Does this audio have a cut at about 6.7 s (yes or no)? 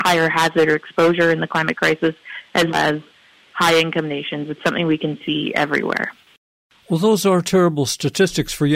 no